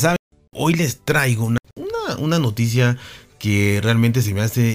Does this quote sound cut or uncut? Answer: uncut